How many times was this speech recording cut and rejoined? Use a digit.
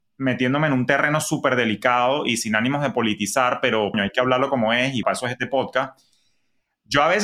2